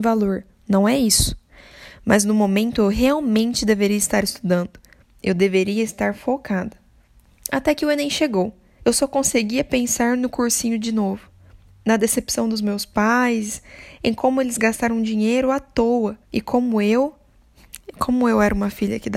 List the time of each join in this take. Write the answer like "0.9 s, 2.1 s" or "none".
8.8 s, 16.2 s